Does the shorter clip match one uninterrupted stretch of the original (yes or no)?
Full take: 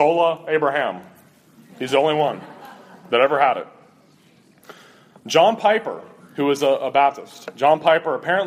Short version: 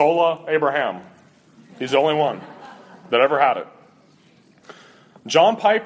yes